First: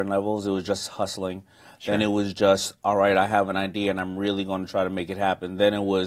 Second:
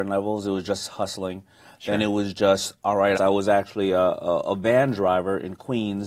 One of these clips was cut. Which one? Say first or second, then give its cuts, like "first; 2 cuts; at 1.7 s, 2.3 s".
second; 1 cut; at 3.1 s